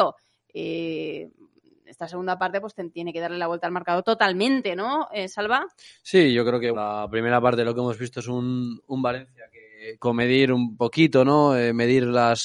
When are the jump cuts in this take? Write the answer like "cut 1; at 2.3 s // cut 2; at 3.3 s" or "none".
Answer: cut 1; at 6.7 s // cut 2; at 10.0 s